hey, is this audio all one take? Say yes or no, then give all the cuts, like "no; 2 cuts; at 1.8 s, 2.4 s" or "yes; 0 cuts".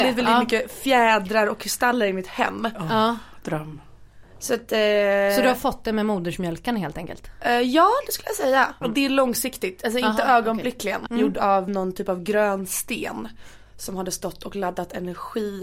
no; 2 cuts; at 8.8 s, 11.1 s